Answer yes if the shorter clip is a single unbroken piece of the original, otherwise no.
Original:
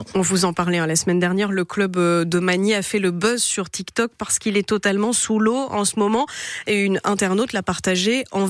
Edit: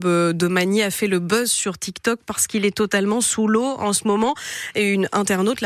yes